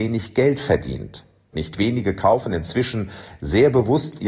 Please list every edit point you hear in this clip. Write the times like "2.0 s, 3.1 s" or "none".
1.5 s